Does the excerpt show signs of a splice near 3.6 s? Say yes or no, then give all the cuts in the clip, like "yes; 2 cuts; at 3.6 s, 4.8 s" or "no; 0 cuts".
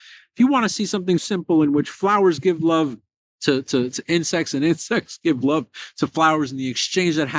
no; 1 cut; at 1.2 s